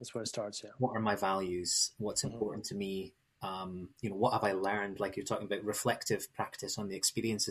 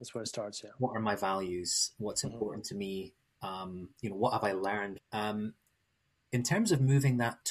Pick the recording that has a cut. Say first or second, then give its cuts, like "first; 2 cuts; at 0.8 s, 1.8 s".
second; 1 cut; at 5.0 s